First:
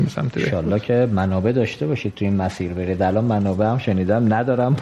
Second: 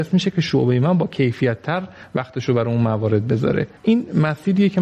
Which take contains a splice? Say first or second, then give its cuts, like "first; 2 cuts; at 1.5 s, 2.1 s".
second; 1 cut; at 3.8 s